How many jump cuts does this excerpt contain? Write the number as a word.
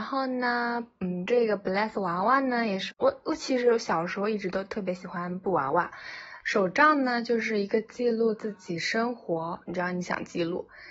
three